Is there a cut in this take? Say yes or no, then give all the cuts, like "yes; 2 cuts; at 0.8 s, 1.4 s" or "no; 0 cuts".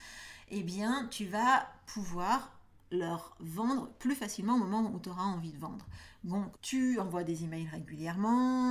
yes; 1 cut; at 6.6 s